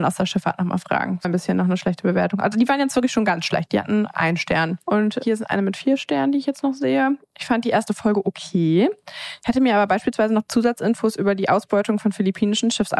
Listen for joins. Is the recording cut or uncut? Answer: cut